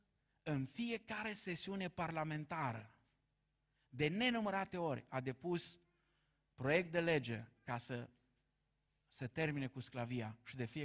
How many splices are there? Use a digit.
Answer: 0